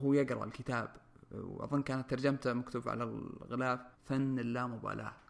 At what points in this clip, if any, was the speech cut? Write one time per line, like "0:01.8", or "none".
0:03.9